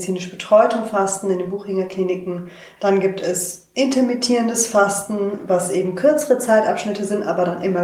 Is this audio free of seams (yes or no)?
no